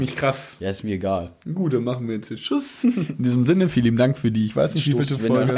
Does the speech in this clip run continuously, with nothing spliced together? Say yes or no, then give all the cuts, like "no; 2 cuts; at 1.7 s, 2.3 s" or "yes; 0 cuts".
no; 1 cut; at 1.4 s